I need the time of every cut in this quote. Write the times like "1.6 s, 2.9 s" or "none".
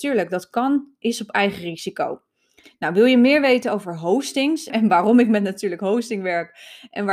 2.6 s, 4.7 s